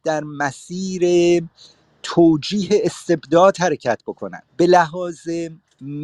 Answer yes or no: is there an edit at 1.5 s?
no